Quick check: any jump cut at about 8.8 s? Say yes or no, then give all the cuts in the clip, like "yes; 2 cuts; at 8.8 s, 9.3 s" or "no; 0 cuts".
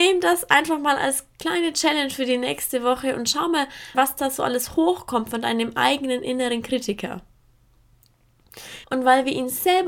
yes; 2 cuts; at 3.9 s, 8.8 s